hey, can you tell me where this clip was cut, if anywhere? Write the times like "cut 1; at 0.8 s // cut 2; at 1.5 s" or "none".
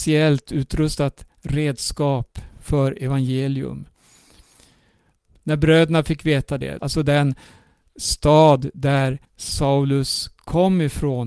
cut 1; at 6.8 s // cut 2; at 9.2 s